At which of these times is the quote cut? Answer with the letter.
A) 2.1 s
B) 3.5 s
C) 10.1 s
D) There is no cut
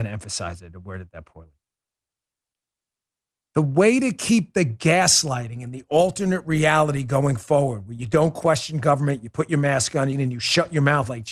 C